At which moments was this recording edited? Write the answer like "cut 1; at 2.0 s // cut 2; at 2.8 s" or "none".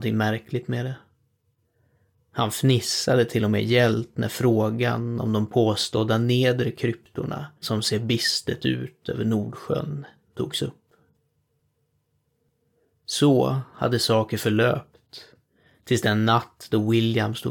cut 1; at 7.6 s